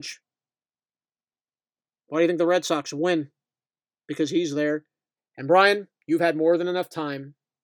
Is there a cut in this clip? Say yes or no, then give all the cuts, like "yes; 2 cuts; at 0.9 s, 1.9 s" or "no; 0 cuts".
yes; 1 cut; at 5.2 s